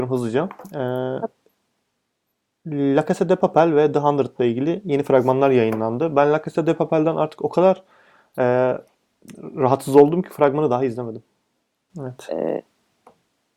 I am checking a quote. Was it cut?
yes; 1 cut; at 11.9 s

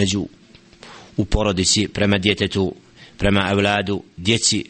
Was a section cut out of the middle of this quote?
no; 0 cuts

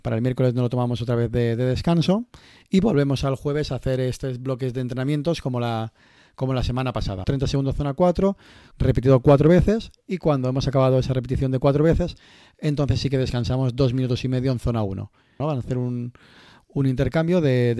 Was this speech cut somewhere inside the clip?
yes; 3 cuts; at 7.2 s, 8.7 s, 15.4 s

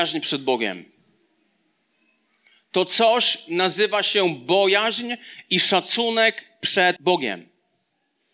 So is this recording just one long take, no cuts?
no; 1 cut; at 7.0 s

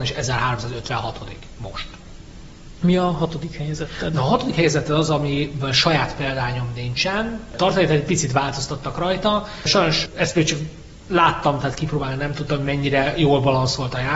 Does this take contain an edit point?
yes; 2 cuts; at 2.8 s, 7.5 s

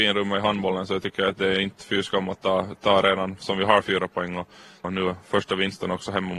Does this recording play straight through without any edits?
no; 1 cut; at 4.8 s

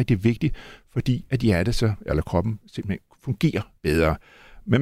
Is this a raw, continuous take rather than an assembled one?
no; 1 cut; at 3.8 s

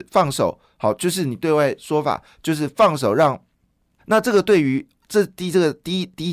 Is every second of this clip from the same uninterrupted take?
no; 1 cut; at 4.0 s

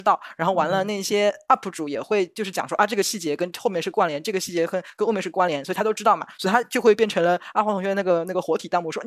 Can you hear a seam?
no; 0 cuts

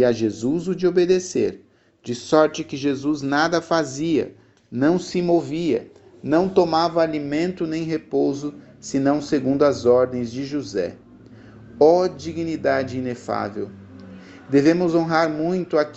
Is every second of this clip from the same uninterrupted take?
yes; 0 cuts

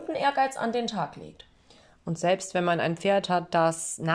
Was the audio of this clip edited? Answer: no; 0 cuts

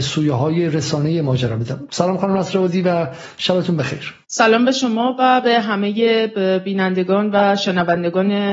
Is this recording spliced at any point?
yes; 1 cut; at 4.2 s

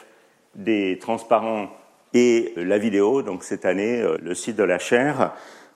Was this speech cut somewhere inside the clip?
yes; 2 cuts; at 2.6 s, 4.2 s

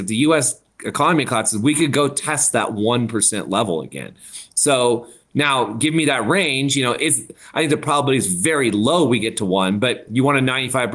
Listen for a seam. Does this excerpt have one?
no; 0 cuts

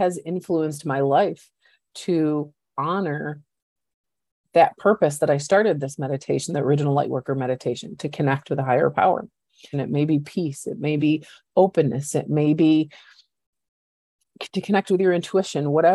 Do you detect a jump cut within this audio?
yes; 1 cut; at 9.7 s

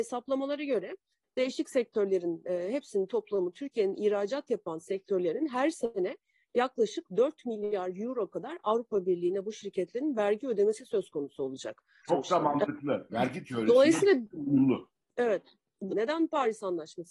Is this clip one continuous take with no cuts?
no; 3 cuts; at 12.0 s, 13.1 s, 15.9 s

